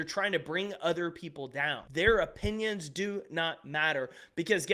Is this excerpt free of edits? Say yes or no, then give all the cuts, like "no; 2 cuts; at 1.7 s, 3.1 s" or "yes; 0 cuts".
no; 1 cut; at 1.9 s